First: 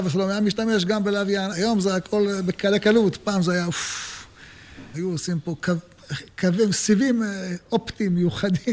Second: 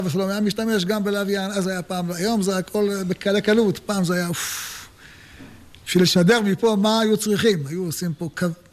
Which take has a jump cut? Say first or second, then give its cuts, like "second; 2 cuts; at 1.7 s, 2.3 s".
first; 2 cuts; at 1.5 s, 4.9 s